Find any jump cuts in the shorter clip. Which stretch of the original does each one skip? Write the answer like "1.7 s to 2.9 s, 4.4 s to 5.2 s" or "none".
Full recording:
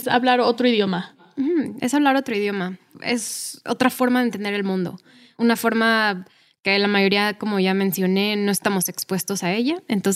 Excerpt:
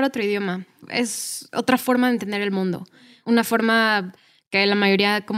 none